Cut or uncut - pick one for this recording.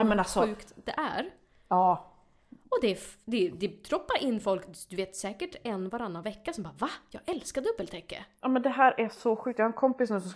uncut